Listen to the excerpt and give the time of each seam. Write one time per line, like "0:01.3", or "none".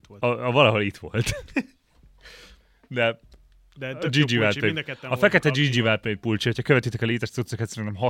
none